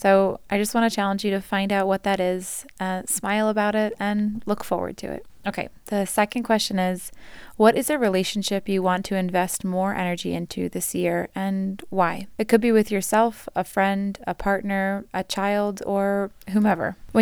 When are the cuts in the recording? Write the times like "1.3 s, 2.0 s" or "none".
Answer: none